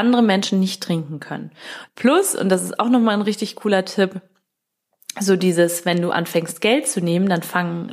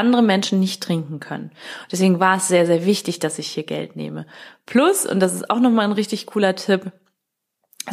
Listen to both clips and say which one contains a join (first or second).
first